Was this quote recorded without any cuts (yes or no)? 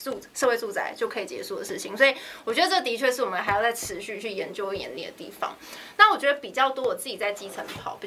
yes